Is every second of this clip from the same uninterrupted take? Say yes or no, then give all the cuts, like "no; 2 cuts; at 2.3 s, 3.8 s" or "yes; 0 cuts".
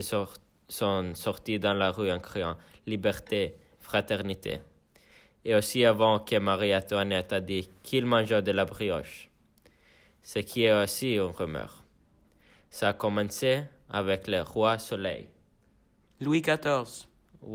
no; 1 cut; at 3.8 s